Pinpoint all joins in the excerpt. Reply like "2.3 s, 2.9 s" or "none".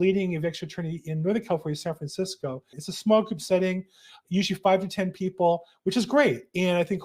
2.7 s